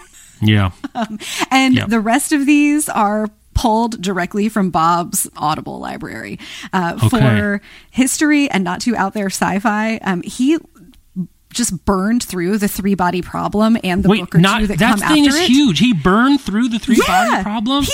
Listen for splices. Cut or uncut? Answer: uncut